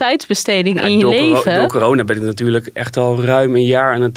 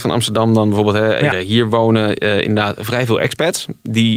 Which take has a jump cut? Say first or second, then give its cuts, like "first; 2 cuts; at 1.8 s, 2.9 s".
second; 1 cut; at 1.3 s